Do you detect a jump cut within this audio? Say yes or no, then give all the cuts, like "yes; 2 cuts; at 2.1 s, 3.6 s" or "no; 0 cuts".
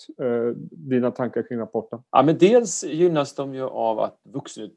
yes; 1 cut; at 2.1 s